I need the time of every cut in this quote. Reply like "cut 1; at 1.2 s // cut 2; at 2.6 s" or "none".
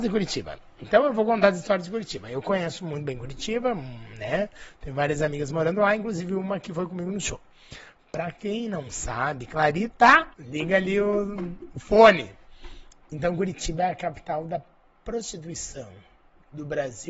cut 1; at 10.3 s